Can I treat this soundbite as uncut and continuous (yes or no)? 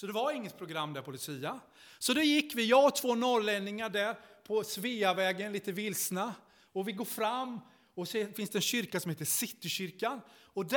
no